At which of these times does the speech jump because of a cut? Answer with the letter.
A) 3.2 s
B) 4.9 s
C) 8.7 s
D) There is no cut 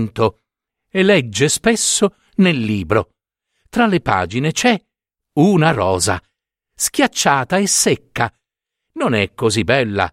D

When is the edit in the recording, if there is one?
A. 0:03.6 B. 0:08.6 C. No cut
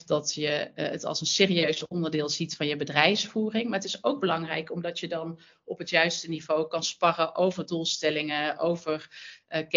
C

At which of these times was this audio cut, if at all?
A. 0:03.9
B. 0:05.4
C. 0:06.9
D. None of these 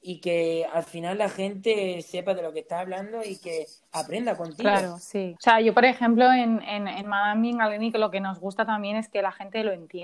B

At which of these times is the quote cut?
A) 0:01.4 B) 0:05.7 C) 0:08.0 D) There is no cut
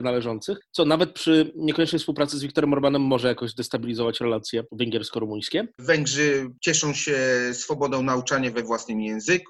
B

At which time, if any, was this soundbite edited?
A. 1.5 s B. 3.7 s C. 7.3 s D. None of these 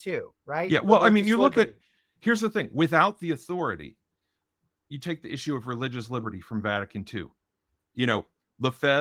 D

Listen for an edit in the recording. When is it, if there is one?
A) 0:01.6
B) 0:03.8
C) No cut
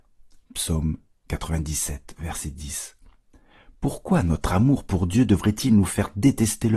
C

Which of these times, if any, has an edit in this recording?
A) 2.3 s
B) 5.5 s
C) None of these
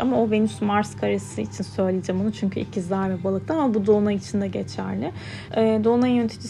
B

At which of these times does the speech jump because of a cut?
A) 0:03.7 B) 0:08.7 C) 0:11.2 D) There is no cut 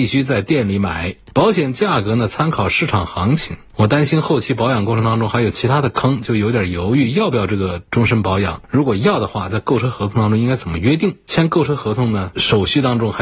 D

